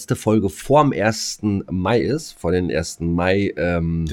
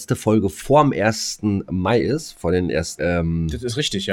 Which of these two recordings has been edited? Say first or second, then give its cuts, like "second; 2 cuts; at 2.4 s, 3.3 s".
second; 1 cut; at 3.0 s